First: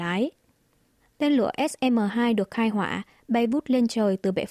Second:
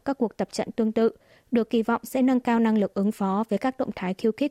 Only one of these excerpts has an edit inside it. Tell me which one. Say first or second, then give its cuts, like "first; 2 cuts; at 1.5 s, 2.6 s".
first; 1 cut; at 1.0 s